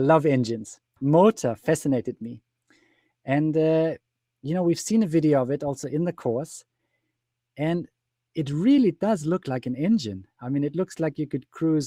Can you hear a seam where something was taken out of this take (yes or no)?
yes